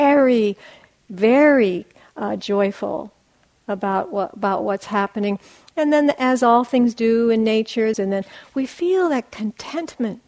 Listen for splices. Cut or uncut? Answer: cut